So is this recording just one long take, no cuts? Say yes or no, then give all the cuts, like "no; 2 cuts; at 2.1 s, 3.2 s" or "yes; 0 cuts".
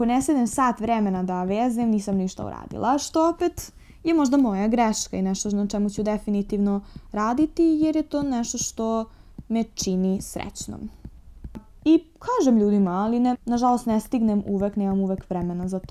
no; 2 cuts; at 11.8 s, 13.3 s